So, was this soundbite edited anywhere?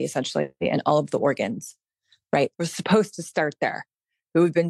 yes; 1 cut; at 2.5 s

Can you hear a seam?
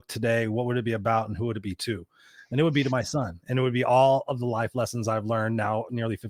no; 0 cuts

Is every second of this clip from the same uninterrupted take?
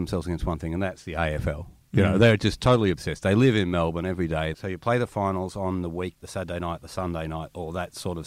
no; 2 cuts; at 4.5 s, 6.2 s

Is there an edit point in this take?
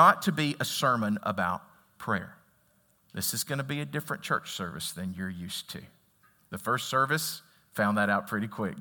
yes; 1 cut; at 3.0 s

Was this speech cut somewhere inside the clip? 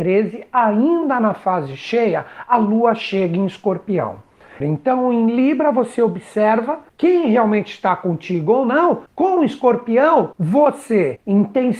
yes; 1 cut; at 4.6 s

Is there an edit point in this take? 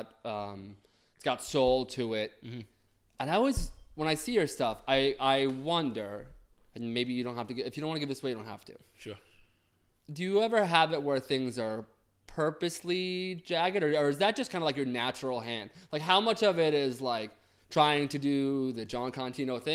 no; 0 cuts

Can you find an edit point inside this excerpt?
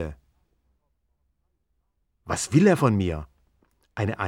no; 0 cuts

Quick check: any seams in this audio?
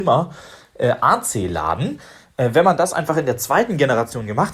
no; 0 cuts

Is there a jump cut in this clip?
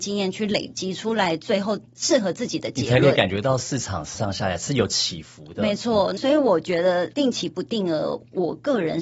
yes; 2 cuts; at 4.1 s, 6.2 s

